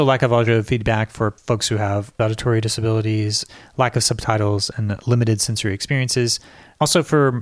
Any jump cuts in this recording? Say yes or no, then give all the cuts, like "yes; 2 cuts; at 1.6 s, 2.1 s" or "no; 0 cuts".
no; 0 cuts